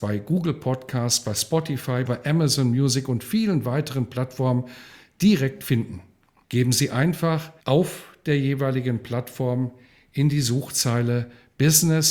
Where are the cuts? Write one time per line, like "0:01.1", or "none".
0:02.1
0:06.4
0:07.6

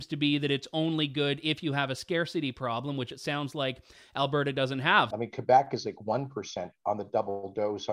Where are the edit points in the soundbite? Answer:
0:05.1

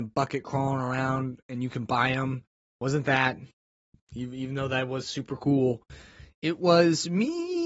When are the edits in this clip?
none

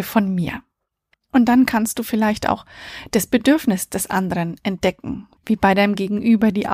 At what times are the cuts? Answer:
0:01.1
0:05.4

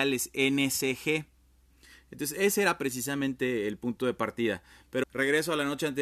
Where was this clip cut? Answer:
0:05.0

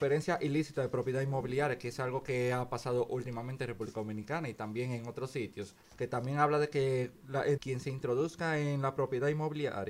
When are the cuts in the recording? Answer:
0:05.8
0:07.6

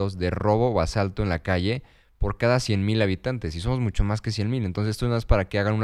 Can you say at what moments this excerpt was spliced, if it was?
none

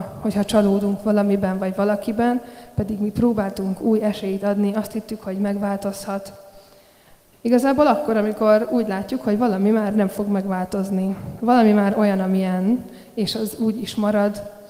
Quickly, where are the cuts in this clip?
0:07.3

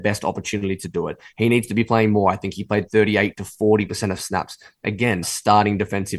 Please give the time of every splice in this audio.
0:05.2

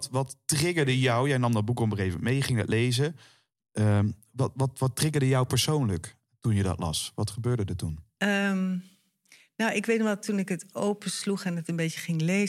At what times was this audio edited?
none

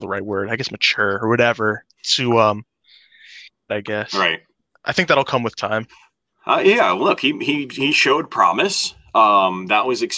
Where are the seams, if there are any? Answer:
0:03.7

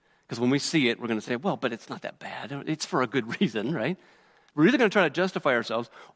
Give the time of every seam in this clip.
none

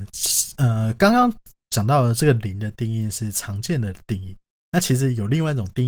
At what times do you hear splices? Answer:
none

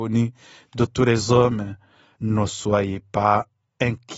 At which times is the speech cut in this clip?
0:02.1

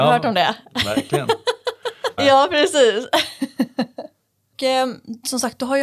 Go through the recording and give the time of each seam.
0:02.2

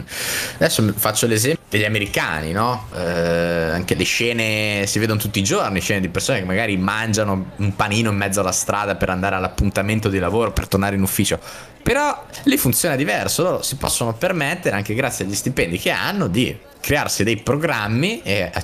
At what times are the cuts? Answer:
0:02.9

